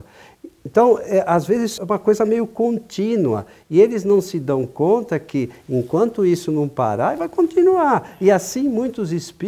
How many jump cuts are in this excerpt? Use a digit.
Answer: 1